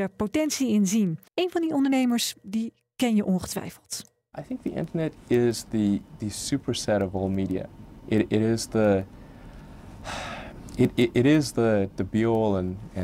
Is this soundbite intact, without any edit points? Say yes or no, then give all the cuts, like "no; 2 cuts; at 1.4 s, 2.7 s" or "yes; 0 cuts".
no; 1 cut; at 1.3 s